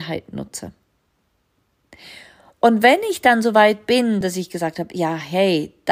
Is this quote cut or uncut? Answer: uncut